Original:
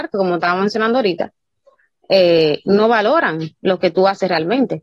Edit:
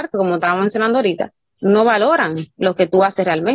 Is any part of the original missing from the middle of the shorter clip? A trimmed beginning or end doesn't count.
yes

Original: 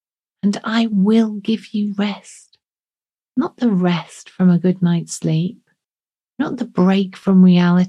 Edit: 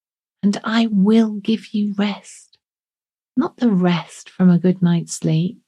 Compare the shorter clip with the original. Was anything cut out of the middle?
no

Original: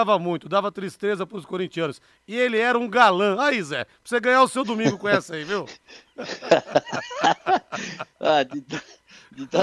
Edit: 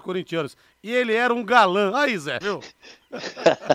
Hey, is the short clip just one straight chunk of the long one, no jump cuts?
no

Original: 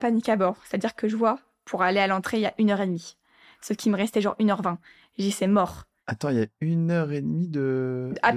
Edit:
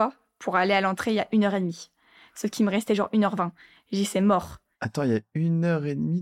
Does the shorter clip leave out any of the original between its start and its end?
no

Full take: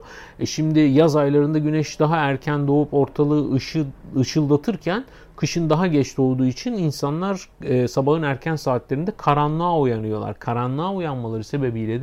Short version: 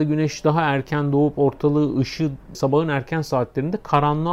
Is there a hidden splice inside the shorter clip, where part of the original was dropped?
yes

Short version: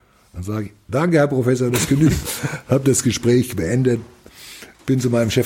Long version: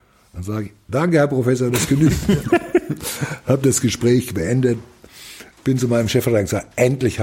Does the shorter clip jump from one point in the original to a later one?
yes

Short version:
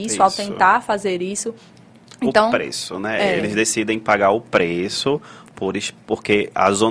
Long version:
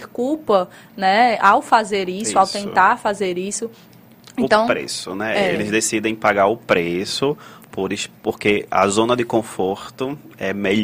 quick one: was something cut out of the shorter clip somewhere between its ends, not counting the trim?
no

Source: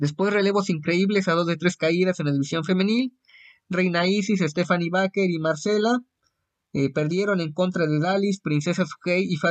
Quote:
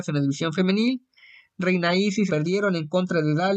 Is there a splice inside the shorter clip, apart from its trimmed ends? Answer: yes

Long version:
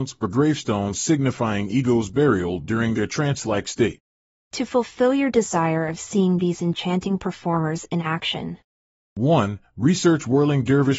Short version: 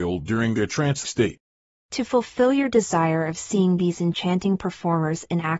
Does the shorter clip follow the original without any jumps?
no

